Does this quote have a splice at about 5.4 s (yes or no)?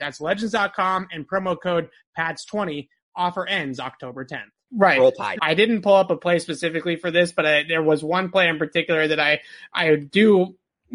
yes